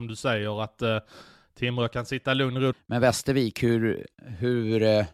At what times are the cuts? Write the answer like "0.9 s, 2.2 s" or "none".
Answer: 2.7 s